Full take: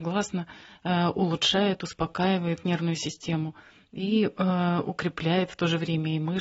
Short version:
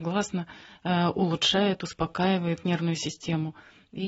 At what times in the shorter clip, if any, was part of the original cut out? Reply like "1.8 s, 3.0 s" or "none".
none